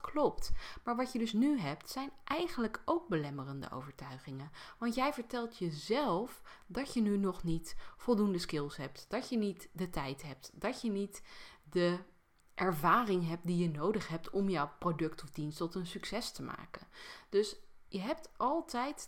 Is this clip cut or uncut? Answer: uncut